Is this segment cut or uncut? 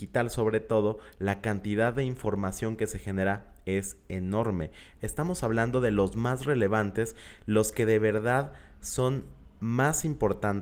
cut